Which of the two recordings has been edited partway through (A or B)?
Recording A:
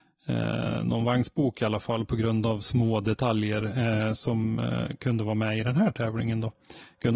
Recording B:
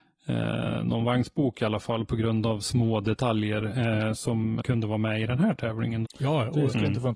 B